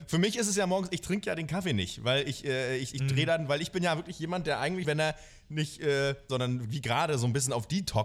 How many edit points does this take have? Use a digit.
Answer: 2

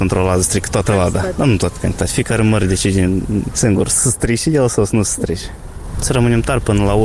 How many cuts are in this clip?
1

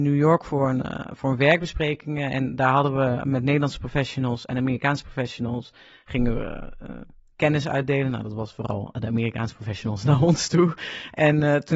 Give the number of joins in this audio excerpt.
0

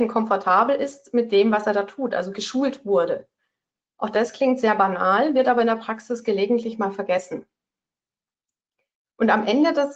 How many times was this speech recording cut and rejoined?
0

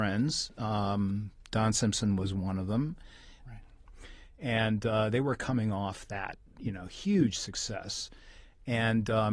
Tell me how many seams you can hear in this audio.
1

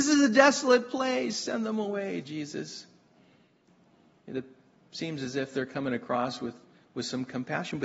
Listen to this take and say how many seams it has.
0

